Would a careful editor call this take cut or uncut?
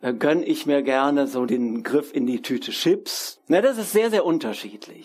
cut